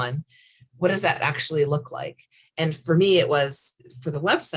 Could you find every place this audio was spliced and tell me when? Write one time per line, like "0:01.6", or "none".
none